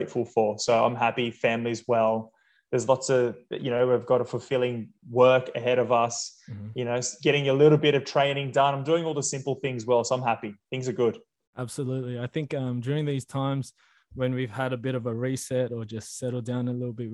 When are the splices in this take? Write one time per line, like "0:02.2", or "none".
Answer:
none

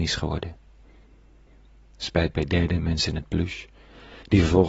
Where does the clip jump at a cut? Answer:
none

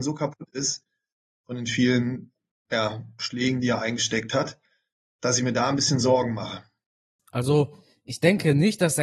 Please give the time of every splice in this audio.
0:07.2

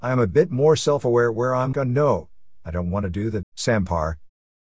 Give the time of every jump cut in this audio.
0:01.7
0:03.4

